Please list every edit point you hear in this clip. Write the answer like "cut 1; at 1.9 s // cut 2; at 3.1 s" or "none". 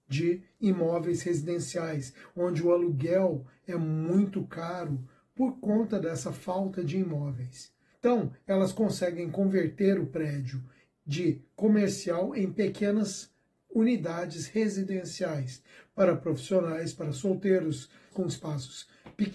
cut 1; at 7.9 s // cut 2; at 18.1 s